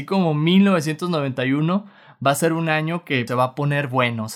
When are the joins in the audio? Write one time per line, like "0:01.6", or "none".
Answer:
0:03.3